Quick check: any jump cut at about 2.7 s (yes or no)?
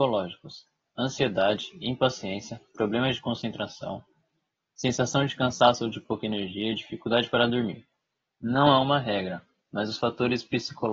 no